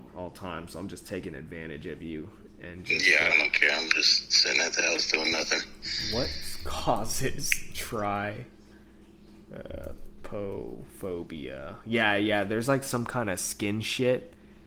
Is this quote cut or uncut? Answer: cut